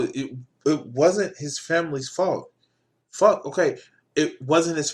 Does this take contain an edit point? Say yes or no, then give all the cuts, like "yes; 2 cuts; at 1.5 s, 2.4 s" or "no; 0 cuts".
yes; 1 cut; at 4.0 s